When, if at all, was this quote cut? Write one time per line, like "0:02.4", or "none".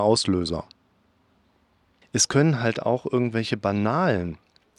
0:02.0